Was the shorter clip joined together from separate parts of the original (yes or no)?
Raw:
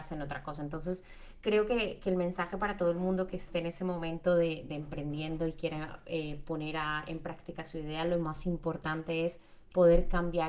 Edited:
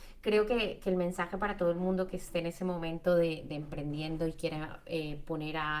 no